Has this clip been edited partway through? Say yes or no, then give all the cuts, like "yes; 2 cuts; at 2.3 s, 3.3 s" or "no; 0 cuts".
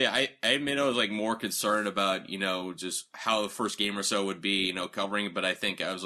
no; 0 cuts